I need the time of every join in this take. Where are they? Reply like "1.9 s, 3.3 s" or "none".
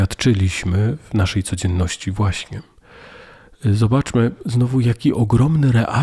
none